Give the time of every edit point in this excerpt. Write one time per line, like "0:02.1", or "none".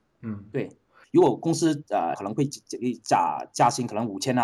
0:01.0
0:02.1